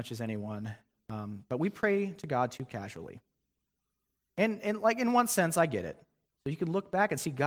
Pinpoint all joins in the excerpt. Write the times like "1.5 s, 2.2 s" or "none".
6.2 s

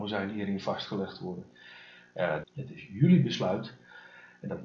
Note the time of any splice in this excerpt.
2.4 s

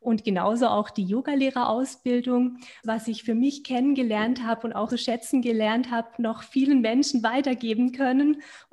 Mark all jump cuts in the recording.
2.8 s, 4.9 s

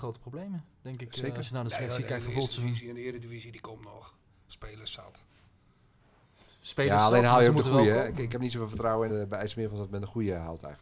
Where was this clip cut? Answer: 9.1 s

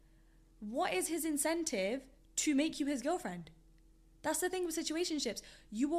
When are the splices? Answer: none

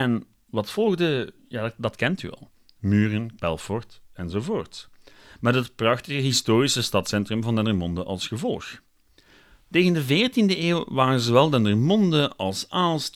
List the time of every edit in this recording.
3.4 s

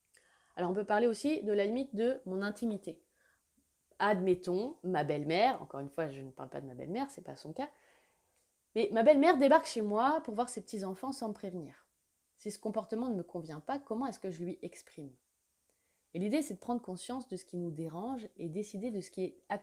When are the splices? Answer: none

